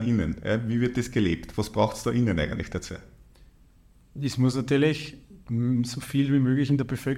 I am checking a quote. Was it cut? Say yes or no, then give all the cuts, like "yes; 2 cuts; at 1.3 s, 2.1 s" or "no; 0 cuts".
no; 0 cuts